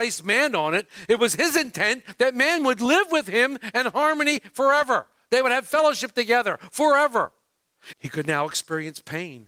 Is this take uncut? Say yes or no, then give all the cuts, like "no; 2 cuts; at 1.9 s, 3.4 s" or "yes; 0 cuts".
no; 1 cut; at 7.9 s